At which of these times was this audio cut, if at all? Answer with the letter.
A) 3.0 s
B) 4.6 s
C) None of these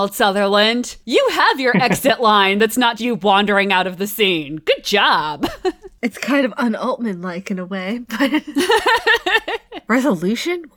A